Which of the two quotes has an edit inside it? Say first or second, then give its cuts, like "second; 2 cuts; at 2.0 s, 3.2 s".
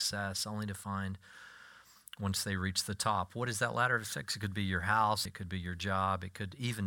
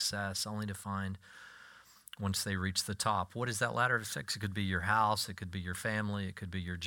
first; 1 cut; at 5.3 s